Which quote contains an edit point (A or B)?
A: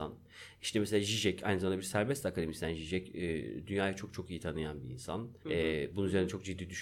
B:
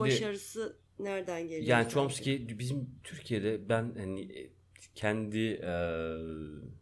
A